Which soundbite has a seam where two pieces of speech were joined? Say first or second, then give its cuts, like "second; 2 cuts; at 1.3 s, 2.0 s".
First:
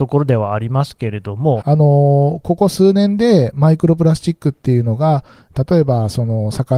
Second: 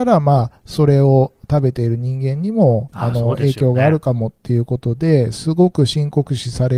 first; 1 cut; at 1.6 s